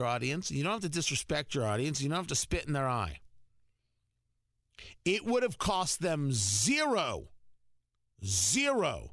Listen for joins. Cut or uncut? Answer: uncut